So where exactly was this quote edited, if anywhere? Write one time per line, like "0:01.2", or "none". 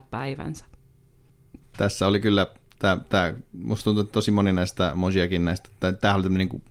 0:01.6